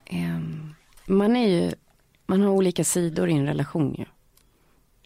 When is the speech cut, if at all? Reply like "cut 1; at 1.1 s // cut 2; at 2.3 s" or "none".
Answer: none

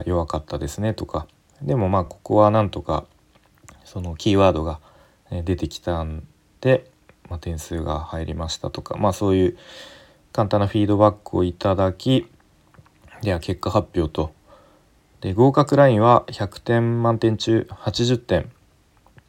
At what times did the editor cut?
none

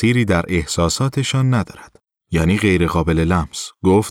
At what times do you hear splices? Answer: cut 1; at 2.2 s

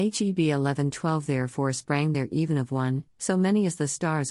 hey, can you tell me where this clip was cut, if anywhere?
cut 1; at 3.1 s

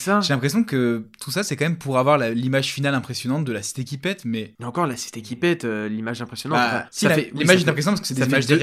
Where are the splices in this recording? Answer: none

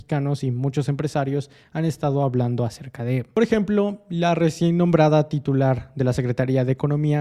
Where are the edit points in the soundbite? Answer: none

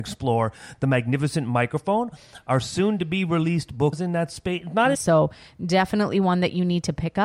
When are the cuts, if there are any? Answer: cut 1; at 3.9 s // cut 2; at 4.9 s

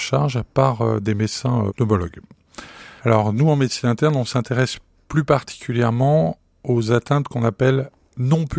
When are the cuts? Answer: cut 1; at 1.7 s // cut 2; at 3.0 s

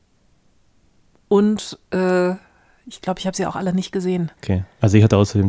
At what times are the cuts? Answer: cut 1; at 4.4 s

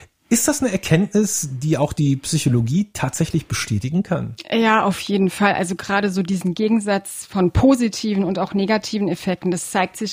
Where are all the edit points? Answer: none

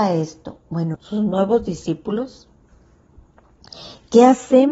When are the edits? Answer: cut 1; at 0.9 s

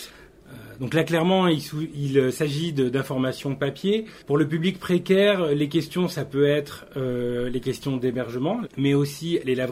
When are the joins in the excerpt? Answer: cut 1; at 8.6 s

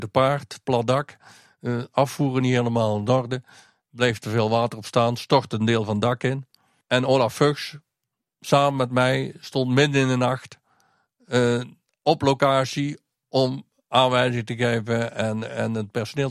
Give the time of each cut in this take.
none

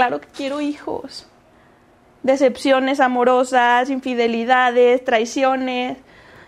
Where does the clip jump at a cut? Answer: cut 1; at 2.2 s

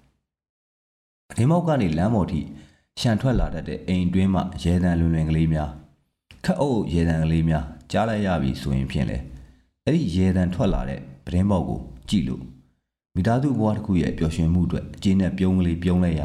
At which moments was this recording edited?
none

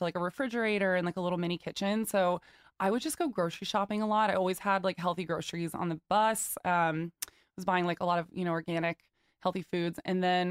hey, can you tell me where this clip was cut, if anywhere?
none

